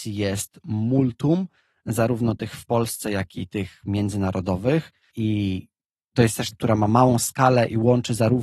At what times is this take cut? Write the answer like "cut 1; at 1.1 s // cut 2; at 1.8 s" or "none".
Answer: cut 1; at 5.1 s // cut 2; at 6.5 s